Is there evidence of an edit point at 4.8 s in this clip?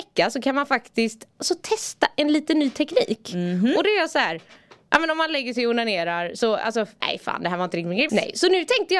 no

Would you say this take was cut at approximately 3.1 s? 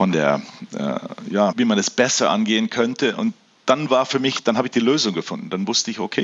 no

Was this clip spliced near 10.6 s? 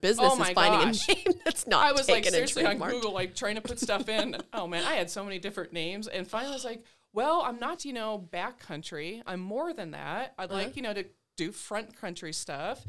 no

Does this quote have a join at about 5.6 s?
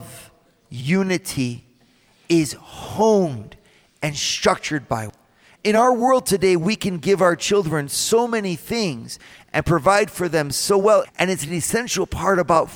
yes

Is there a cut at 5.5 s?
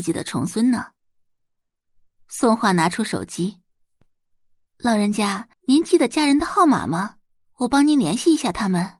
yes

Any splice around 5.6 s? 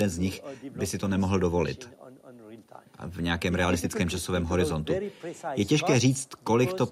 no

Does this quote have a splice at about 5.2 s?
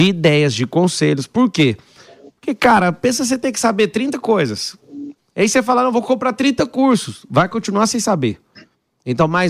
yes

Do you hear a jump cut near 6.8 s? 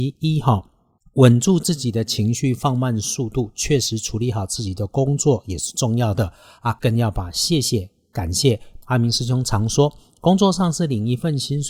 yes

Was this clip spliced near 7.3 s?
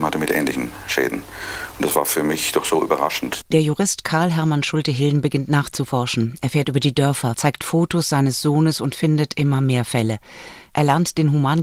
yes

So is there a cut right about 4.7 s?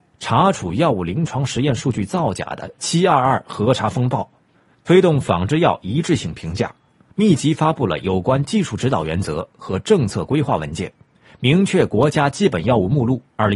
yes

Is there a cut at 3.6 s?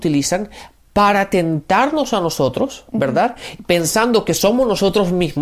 no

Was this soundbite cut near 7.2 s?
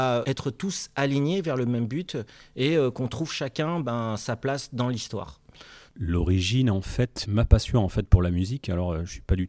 yes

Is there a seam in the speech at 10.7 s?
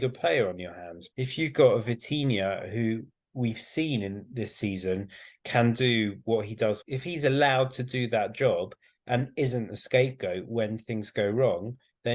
no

